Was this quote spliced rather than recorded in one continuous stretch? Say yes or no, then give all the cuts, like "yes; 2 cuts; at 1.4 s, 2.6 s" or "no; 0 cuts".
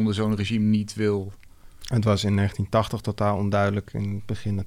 no; 0 cuts